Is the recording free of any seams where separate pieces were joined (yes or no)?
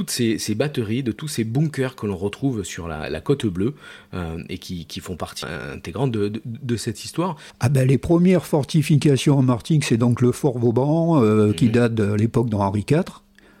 no